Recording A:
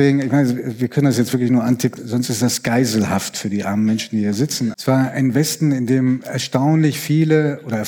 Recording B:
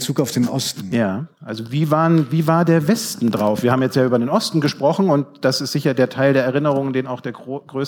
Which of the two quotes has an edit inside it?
A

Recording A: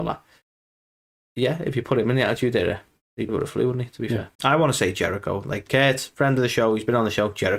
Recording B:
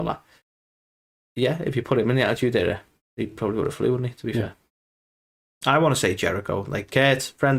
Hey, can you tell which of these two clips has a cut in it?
A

